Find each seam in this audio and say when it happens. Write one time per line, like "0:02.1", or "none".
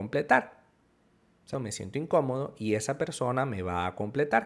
0:01.5